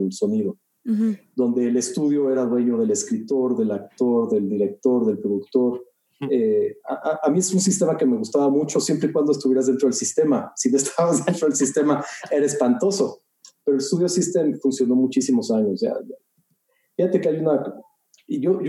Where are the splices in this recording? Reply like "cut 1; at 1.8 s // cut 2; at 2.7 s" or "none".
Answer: none